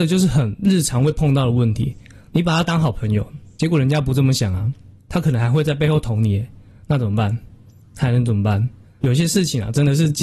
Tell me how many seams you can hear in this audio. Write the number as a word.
one